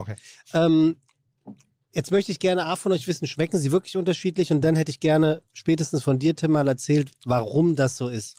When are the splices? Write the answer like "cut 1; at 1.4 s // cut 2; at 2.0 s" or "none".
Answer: none